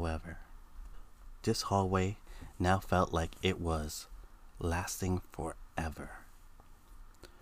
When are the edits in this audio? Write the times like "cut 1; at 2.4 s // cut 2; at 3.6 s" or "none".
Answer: cut 1; at 1.4 s